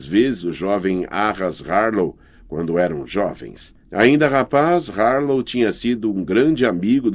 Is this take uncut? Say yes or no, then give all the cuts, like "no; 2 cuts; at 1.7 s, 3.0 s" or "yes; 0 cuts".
no; 1 cut; at 3.8 s